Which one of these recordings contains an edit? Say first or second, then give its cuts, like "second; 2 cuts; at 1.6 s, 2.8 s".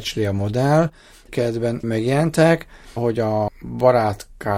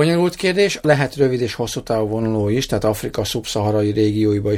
first; 2 cuts; at 1.3 s, 3.0 s